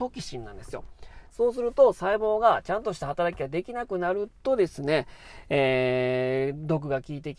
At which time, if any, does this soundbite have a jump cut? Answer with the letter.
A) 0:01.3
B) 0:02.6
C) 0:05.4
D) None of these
A